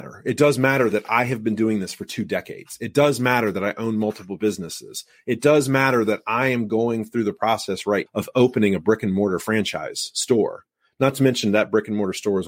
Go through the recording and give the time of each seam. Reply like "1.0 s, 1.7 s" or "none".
8.1 s

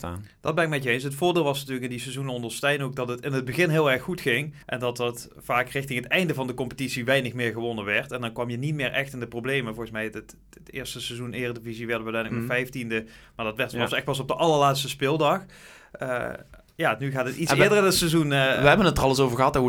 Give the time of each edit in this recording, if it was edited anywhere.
4.6 s

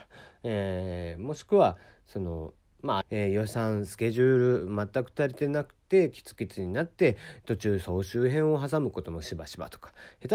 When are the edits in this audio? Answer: 3.0 s

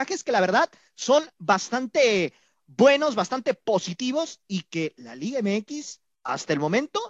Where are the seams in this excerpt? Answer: none

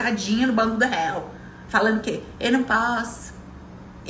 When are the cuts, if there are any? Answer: none

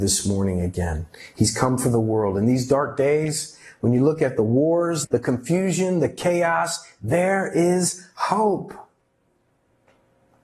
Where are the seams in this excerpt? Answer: 5.0 s

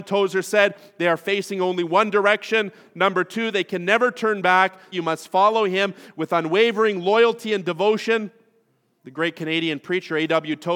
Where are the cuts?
4.9 s, 9.0 s

